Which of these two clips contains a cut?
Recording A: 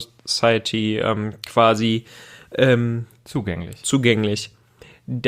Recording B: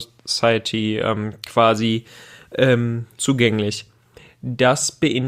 B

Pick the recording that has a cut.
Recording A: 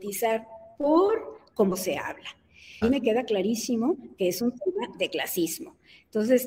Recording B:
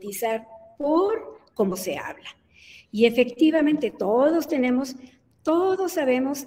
A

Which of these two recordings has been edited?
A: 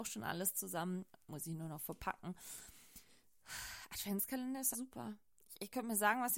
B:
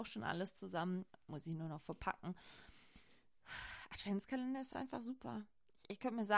A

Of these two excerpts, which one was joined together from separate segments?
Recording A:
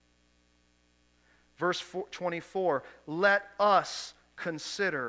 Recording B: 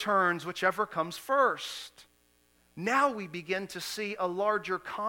B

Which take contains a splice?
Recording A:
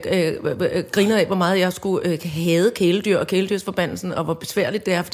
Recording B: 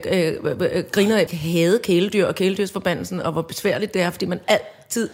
B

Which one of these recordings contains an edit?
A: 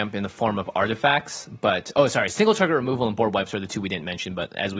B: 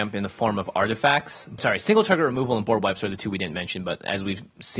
B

